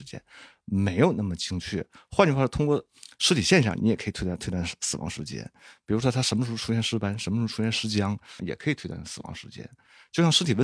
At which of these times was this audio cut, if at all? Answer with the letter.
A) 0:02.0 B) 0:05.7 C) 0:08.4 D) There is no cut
C